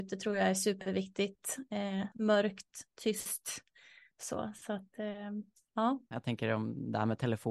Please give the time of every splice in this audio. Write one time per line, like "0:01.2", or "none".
0:02.1
0:04.1
0:06.1